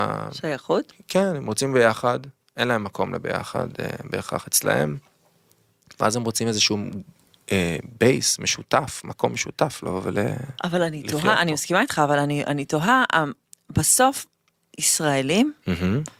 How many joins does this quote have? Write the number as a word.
zero